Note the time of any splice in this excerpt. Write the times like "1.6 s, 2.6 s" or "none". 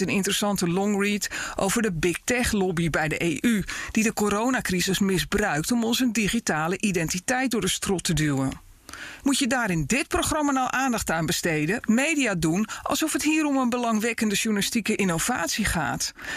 9.2 s, 11.8 s

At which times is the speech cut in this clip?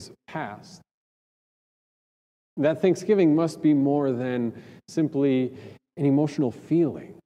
none

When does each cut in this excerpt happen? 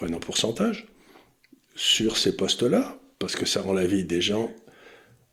none

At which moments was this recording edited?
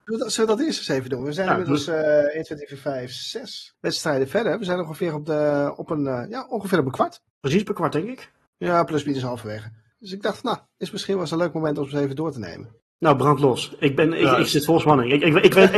none

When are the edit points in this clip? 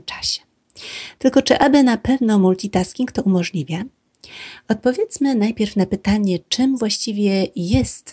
none

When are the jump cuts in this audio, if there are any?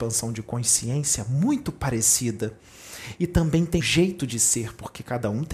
3.8 s

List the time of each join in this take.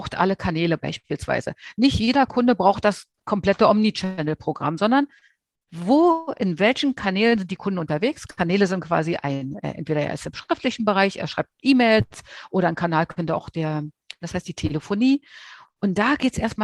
11.6 s, 14.2 s

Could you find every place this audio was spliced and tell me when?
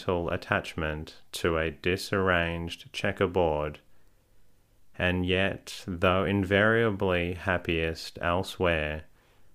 none

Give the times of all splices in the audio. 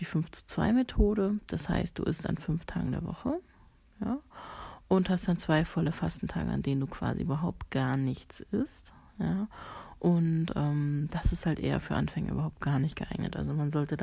none

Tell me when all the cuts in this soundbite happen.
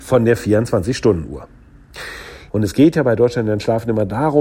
2.5 s

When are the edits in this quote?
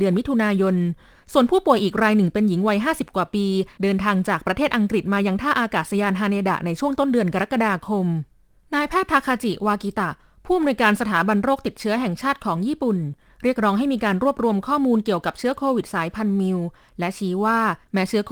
none

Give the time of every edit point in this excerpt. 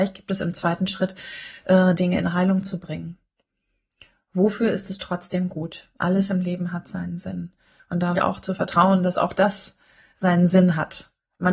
2.0 s, 8.2 s

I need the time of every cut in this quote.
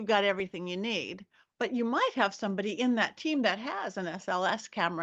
none

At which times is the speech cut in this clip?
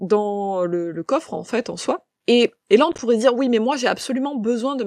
2.2 s

